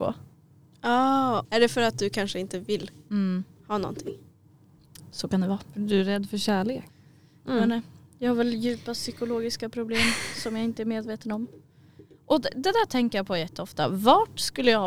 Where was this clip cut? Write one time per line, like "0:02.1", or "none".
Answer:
0:01.4

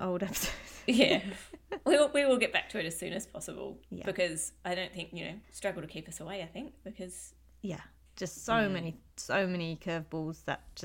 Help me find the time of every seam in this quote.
0:05.4
0:08.1

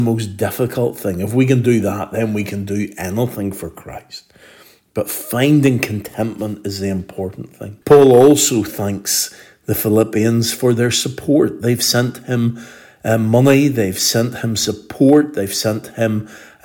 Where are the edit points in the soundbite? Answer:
0:07.8

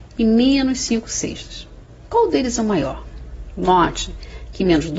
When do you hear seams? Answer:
none

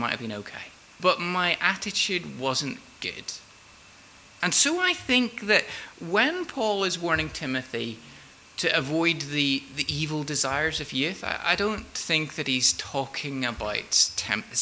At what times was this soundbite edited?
0:01.0
0:04.4

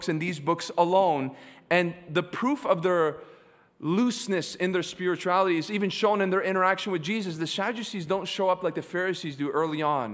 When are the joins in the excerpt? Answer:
none

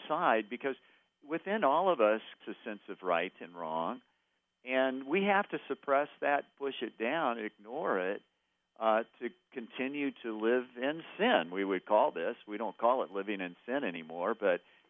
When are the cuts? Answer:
0:02.4

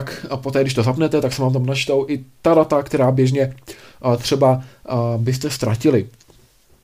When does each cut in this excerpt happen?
none

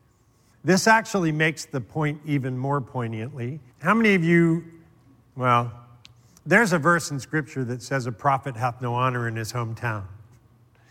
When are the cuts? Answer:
0:03.7

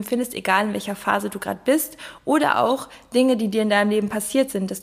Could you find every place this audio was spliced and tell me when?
none

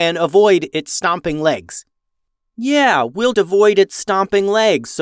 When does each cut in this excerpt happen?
0:03.3

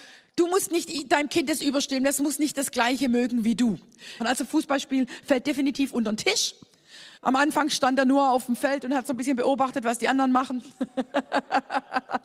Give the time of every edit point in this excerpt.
0:04.2
0:07.1

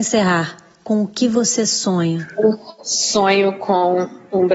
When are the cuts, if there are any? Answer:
none

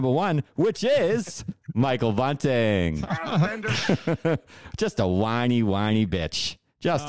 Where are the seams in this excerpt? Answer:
none

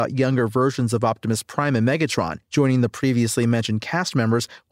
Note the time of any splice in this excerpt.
0:02.4

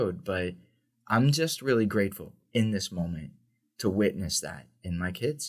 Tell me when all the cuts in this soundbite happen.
none

